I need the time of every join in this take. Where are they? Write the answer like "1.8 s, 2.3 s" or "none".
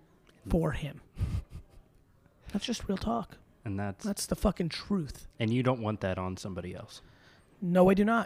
none